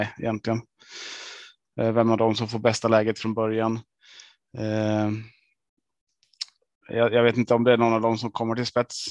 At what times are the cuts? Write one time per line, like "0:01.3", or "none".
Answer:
0:01.7